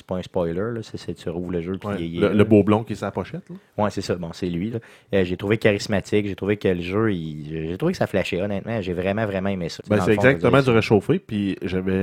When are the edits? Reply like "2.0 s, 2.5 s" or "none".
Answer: 4.7 s, 9.8 s